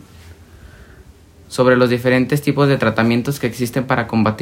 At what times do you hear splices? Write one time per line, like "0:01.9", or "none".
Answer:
0:01.4